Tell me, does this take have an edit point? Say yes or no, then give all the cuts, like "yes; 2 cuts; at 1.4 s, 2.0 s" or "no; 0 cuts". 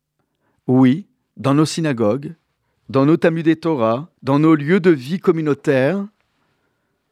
yes; 2 cuts; at 1.3 s, 4.2 s